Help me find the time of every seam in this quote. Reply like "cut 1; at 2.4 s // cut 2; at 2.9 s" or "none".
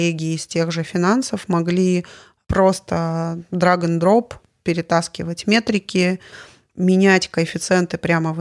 none